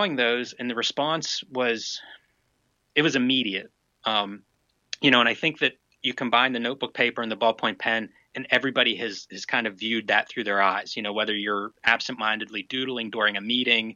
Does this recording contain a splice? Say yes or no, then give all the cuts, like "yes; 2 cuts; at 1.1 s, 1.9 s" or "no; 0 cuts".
no; 0 cuts